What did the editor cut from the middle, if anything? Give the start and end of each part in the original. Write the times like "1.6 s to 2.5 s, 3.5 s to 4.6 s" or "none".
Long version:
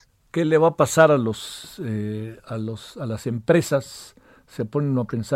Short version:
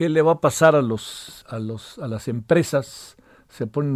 1.8 s to 2.4 s